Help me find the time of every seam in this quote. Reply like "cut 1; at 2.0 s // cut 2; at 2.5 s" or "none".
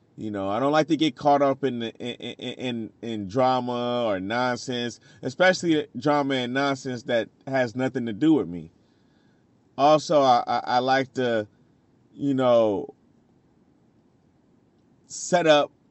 none